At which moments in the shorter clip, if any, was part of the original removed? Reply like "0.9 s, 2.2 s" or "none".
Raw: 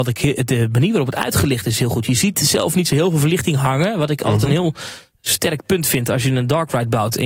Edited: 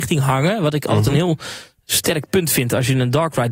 none